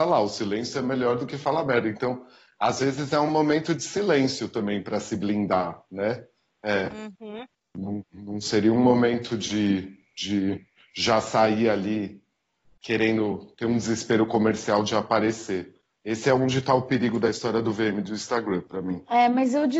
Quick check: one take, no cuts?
yes; 0 cuts

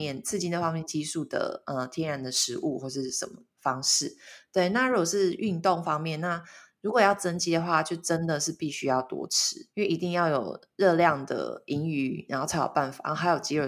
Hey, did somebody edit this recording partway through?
yes; 2 cuts; at 9.7 s, 12.3 s

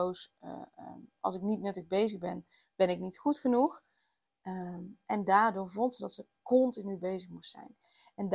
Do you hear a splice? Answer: no; 0 cuts

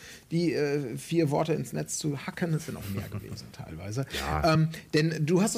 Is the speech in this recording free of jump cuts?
yes; 0 cuts

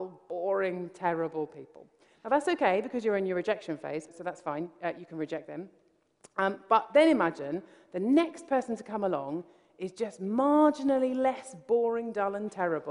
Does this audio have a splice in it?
no; 0 cuts

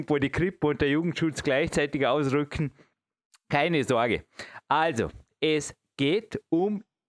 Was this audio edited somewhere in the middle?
no; 0 cuts

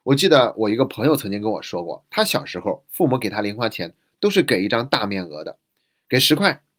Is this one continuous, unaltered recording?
yes; 0 cuts

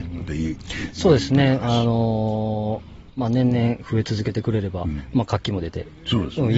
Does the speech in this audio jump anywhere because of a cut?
no; 0 cuts

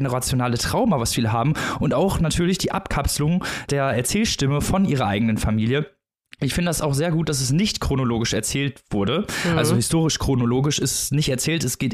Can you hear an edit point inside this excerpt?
no; 0 cuts

